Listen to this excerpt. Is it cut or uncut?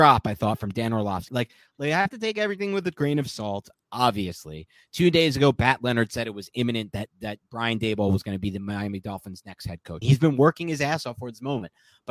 cut